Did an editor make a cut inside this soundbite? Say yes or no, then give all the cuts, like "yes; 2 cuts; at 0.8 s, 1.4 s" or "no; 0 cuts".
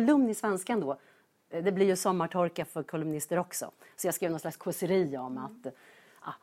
no; 0 cuts